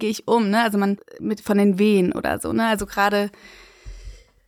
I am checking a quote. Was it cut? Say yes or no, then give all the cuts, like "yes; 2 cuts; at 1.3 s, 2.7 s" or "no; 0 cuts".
yes; 1 cut; at 1.2 s